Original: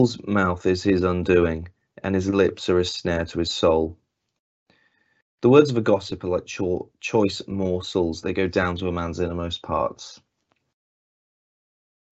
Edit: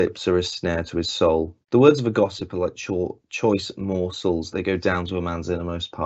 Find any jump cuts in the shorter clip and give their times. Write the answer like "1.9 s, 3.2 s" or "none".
1.6 s